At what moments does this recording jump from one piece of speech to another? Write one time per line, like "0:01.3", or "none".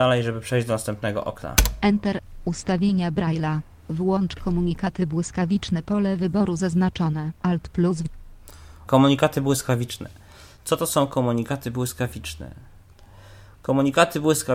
0:08.8